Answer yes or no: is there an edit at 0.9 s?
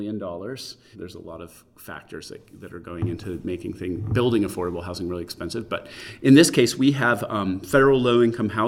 yes